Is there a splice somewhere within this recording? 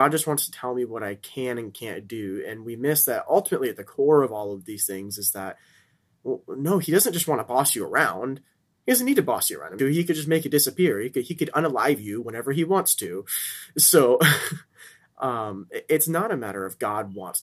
yes; 1 cut; at 9.8 s

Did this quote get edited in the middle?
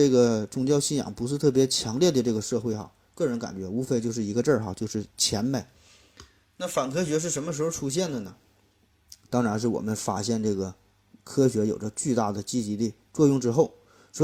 no; 0 cuts

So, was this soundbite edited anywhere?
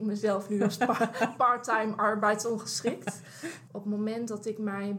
yes; 1 cut; at 3.7 s

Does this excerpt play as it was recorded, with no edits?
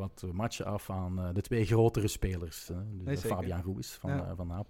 no; 1 cut; at 2.7 s

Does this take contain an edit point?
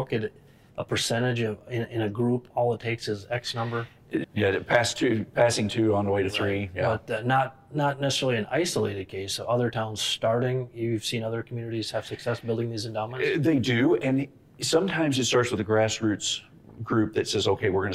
yes; 1 cut; at 4.2 s

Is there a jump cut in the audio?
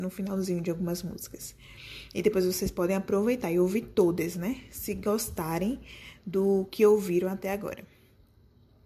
no; 0 cuts

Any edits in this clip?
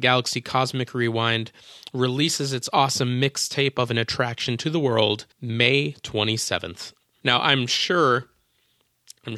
yes; 2 cuts; at 5.3 s, 7.2 s

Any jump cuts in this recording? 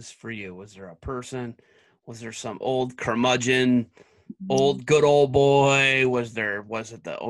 no; 0 cuts

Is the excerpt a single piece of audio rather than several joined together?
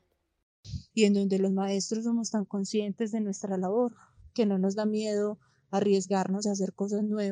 no; 1 cut; at 0.9 s

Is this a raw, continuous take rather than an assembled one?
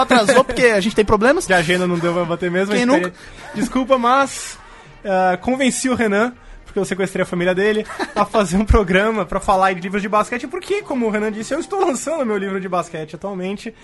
yes; 0 cuts

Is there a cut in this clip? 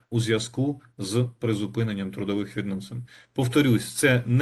no; 0 cuts

